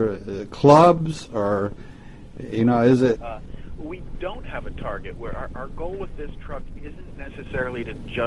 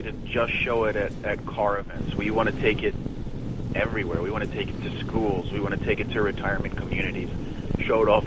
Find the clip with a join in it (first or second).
first